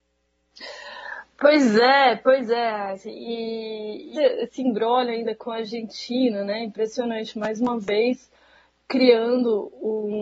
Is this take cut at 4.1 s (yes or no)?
yes